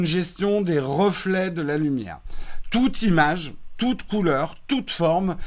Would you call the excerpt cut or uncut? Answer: uncut